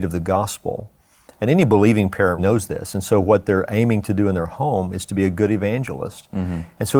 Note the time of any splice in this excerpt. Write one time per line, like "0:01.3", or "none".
0:02.4